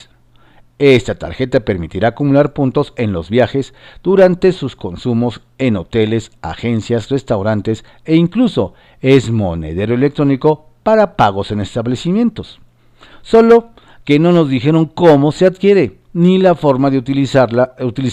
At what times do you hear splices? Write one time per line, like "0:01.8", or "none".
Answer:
none

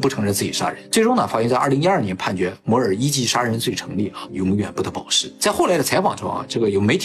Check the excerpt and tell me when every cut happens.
0:04.3

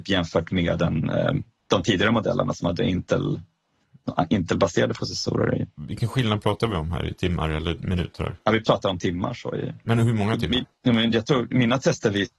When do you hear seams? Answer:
none

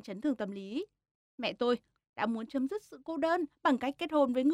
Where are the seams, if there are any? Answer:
0:02.0

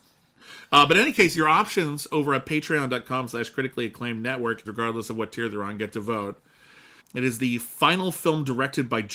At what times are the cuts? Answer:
0:04.6
0:07.0

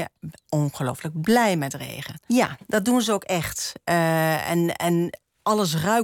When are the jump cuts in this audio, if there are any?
0:02.3

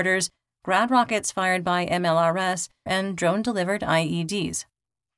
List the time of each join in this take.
0:02.9

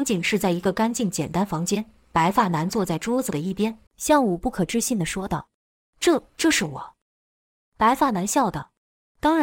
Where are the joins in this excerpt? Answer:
0:03.9

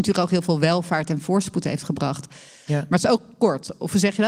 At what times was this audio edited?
0:02.7

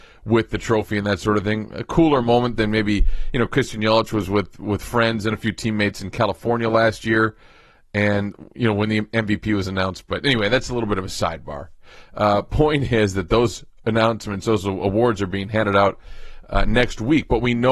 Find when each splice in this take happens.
none

